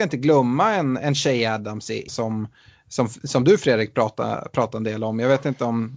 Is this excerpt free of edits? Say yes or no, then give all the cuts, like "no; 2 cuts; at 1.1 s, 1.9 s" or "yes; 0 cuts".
no; 1 cut; at 2.1 s